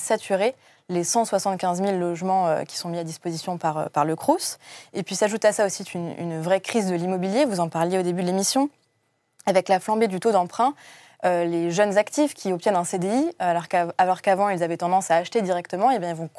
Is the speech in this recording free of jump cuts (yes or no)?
yes